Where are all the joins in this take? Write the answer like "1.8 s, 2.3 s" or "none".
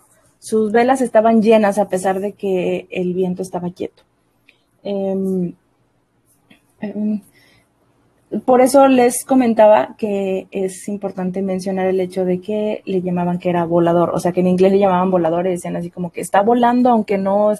6.8 s